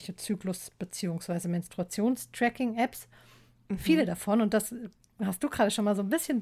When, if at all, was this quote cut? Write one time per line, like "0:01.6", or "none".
none